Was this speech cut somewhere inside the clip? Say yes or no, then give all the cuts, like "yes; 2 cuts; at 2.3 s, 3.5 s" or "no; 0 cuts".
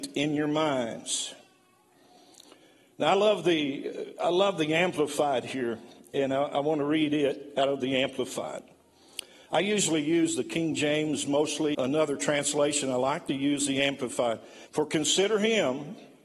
yes; 2 cuts; at 11.7 s, 14.7 s